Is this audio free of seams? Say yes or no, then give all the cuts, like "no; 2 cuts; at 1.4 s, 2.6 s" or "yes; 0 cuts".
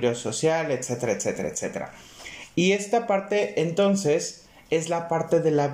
yes; 0 cuts